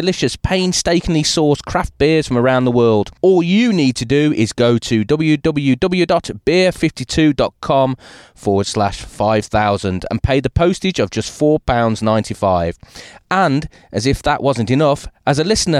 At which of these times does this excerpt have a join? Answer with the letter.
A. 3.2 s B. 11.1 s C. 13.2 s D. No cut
D